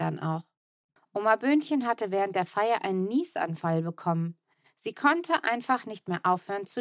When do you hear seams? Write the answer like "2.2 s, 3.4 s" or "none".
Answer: 1.0 s